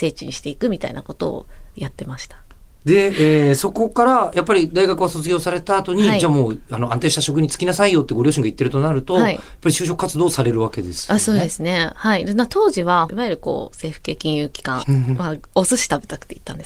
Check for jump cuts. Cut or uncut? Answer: cut